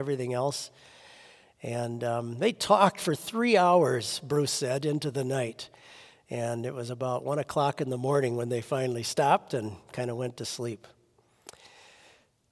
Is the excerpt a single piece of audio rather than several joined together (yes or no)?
yes